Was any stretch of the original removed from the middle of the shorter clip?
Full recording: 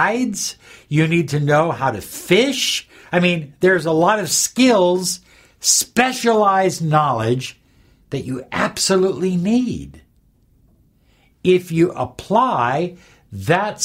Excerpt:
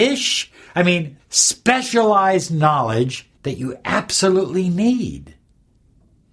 yes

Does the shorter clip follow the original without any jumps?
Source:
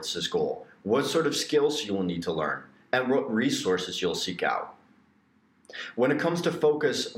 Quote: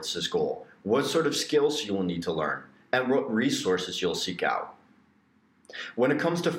yes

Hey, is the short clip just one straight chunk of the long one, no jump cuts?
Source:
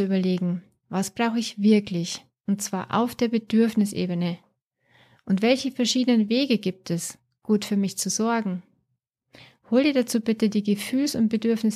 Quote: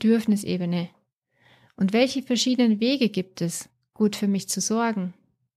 yes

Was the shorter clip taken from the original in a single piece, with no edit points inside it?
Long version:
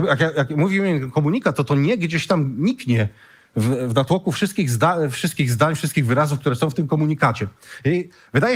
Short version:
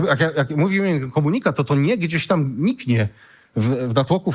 yes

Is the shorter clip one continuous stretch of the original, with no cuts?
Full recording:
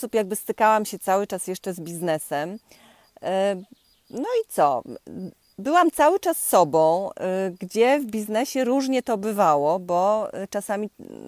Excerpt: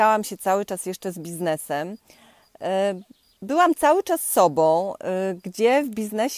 no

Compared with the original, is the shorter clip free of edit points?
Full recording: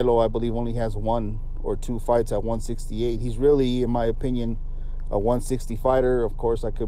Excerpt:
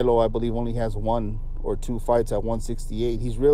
yes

